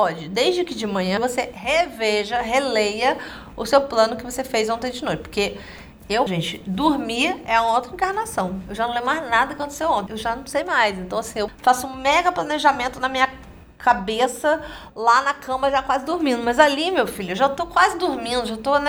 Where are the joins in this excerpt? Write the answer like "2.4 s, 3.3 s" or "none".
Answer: 1.2 s, 6.3 s, 10.1 s